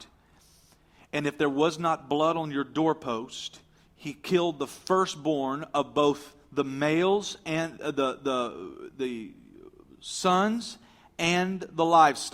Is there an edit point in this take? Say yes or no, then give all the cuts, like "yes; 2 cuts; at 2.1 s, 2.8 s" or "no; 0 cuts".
no; 0 cuts